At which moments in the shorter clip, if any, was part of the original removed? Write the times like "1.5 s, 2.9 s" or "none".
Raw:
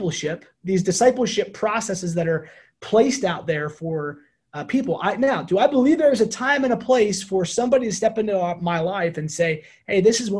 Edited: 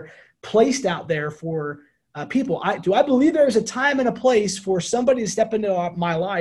2.8 s